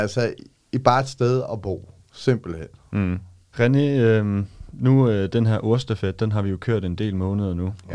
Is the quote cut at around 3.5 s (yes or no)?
yes